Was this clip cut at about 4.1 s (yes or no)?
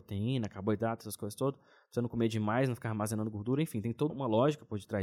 yes